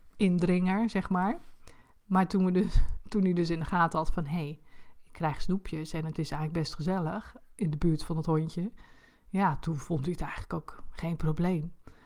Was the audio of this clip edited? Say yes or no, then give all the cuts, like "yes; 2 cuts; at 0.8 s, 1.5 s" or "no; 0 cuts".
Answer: no; 0 cuts